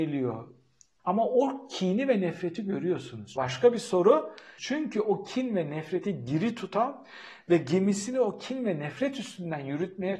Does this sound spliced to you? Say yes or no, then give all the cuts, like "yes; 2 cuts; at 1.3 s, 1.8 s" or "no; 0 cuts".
yes; 3 cuts; at 1.0 s, 3.4 s, 4.6 s